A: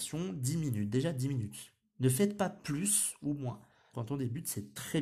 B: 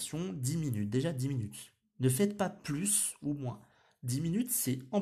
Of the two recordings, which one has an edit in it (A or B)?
A